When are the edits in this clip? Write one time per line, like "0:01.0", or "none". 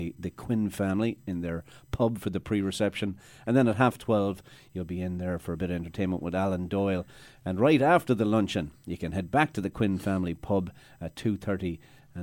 none